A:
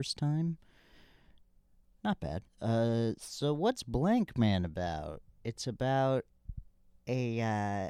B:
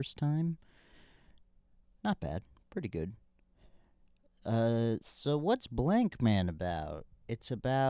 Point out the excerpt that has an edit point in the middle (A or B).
A